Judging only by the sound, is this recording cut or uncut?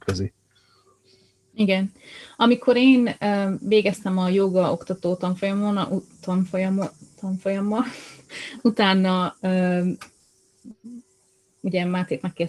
uncut